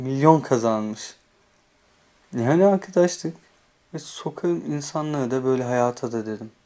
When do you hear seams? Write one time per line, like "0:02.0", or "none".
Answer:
0:03.8